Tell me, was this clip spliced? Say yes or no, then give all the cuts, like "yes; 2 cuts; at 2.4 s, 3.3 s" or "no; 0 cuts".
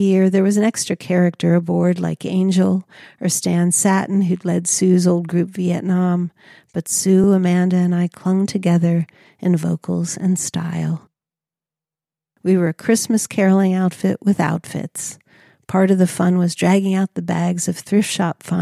no; 0 cuts